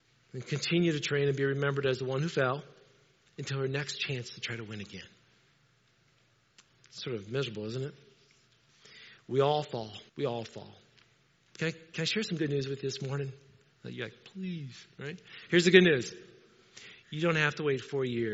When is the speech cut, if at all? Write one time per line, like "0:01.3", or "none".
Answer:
0:10.1